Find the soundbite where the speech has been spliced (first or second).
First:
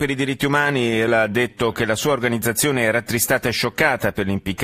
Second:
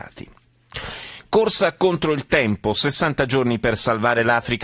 first